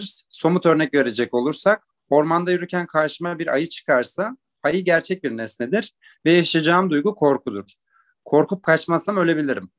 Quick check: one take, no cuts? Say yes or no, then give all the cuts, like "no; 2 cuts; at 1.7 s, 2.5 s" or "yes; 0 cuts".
yes; 0 cuts